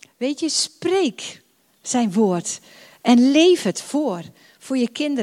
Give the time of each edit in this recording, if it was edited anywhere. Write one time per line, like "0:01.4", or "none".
none

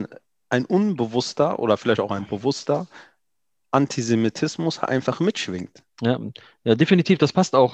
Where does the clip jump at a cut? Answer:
0:05.9

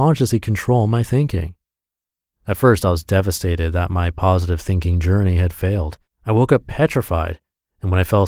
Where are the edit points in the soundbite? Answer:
0:06.1

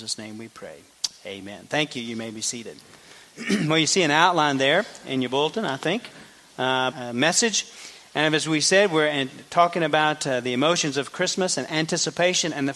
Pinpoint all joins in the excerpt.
0:06.9

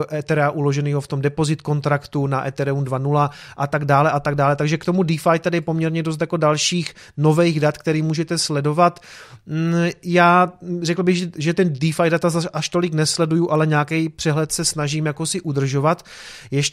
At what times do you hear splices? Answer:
none

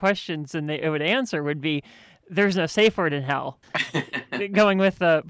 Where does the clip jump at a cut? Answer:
0:03.6

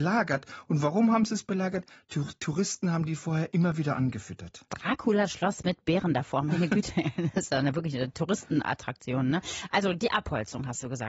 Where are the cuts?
none

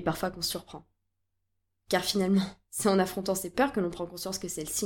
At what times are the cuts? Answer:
0:01.8

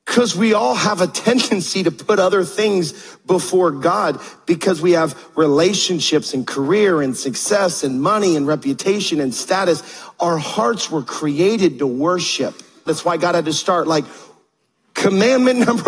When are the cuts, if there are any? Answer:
0:12.9

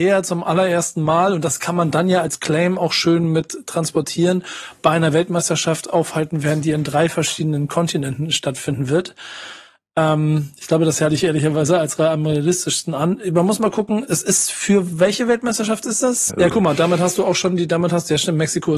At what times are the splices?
0:16.3

